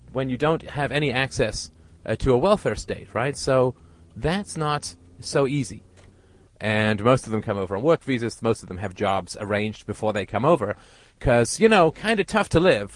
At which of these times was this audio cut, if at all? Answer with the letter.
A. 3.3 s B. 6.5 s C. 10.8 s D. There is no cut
B